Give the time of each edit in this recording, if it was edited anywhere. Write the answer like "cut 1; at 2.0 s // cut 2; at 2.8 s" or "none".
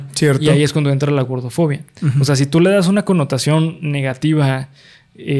none